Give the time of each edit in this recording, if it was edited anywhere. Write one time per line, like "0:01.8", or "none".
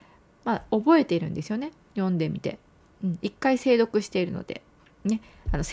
none